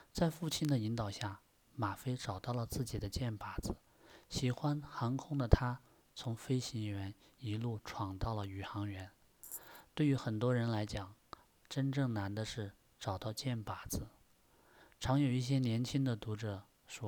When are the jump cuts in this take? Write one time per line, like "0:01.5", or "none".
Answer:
0:11.5